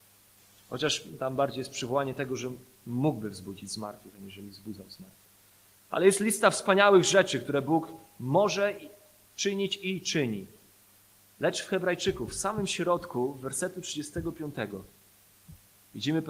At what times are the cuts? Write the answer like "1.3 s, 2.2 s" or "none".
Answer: none